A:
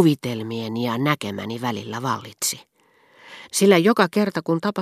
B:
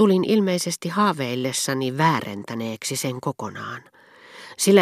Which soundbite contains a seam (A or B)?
A